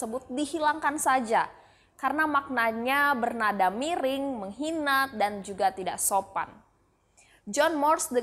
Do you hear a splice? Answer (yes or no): no